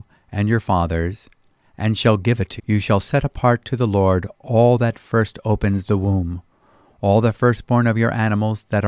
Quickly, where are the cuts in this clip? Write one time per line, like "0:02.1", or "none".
0:02.6